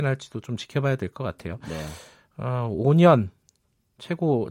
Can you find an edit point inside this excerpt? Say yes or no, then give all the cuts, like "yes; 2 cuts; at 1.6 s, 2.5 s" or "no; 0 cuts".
no; 0 cuts